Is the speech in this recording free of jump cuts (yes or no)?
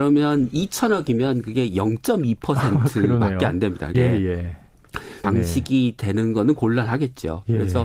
no